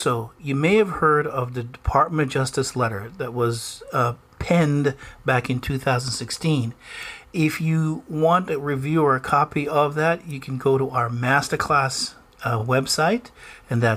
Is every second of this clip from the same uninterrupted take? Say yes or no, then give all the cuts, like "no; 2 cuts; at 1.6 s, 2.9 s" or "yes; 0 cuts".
yes; 0 cuts